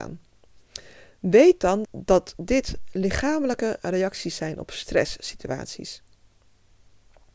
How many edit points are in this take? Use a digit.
1